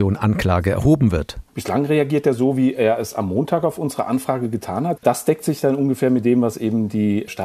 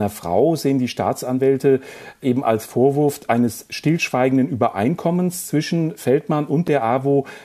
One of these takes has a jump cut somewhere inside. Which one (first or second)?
first